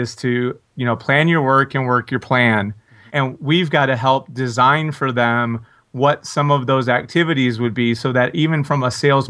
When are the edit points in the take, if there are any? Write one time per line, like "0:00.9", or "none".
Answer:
0:03.1

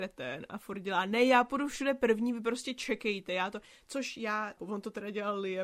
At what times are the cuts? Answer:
0:04.6

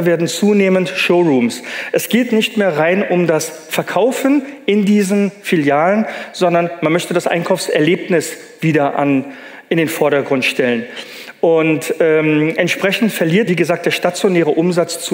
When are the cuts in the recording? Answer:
0:13.5

